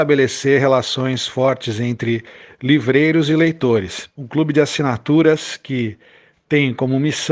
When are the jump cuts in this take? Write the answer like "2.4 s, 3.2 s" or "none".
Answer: 4.1 s